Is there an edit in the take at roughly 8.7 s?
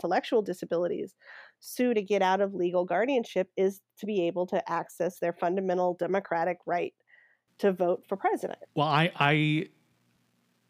yes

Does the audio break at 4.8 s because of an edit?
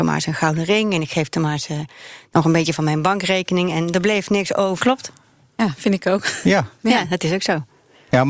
yes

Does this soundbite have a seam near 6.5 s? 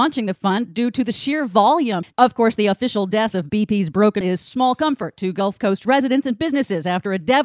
no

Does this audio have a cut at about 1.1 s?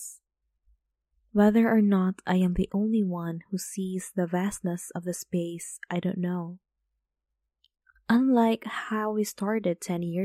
no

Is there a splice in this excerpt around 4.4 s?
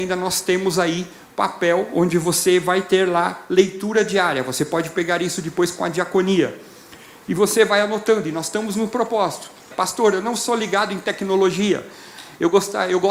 no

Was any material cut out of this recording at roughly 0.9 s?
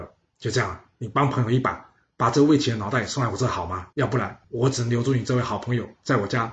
no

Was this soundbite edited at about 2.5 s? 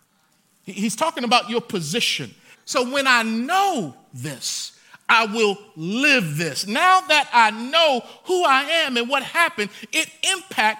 yes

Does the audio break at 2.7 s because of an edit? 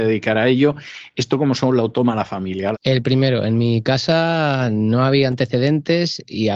yes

